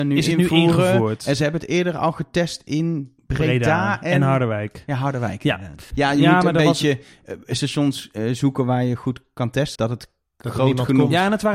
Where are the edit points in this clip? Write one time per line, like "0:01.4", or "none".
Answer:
0:05.9
0:09.8